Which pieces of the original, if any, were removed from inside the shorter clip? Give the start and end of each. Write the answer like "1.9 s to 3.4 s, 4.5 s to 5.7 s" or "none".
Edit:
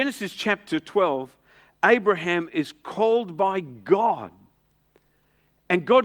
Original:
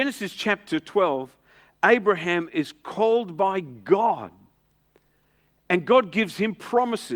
none